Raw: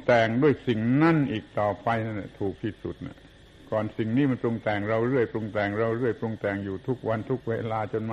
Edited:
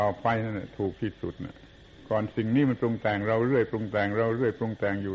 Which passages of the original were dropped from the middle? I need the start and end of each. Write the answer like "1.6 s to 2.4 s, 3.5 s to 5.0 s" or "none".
none